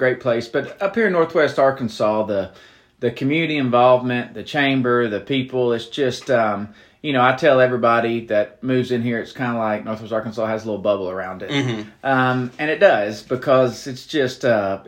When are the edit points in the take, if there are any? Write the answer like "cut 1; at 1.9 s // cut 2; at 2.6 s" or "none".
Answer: none